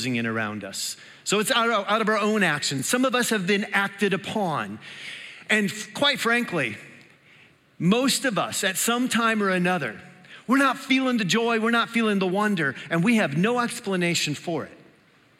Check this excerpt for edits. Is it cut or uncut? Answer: uncut